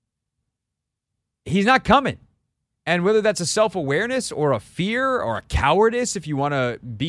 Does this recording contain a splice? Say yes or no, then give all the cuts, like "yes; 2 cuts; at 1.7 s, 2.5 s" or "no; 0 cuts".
yes; 1 cut; at 2.7 s